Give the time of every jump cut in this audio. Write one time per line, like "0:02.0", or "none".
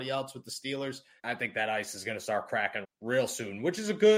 0:01.2
0:02.8